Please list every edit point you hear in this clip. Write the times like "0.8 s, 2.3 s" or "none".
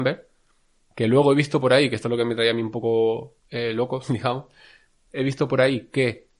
3.4 s